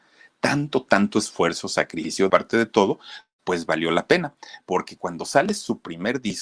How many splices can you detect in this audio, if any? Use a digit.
1